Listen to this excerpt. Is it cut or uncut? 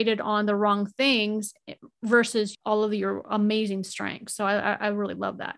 uncut